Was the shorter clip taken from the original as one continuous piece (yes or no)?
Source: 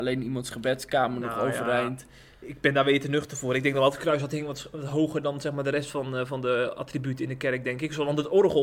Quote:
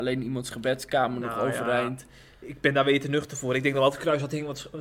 yes